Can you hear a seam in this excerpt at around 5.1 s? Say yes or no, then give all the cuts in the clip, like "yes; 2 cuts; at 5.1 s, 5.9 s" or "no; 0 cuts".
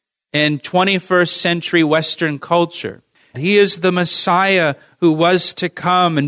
no; 1 cut; at 3.3 s